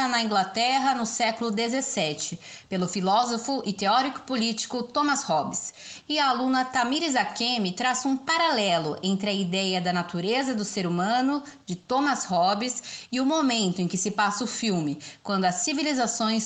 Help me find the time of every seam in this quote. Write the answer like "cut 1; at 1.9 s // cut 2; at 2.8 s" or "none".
none